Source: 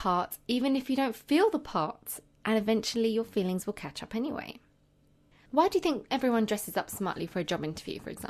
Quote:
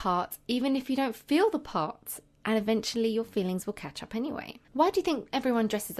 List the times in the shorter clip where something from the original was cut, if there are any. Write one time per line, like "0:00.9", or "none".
0:04.6